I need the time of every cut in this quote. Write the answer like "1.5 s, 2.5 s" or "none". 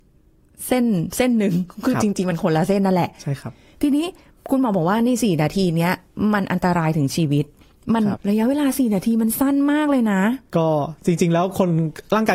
8.2 s, 10.5 s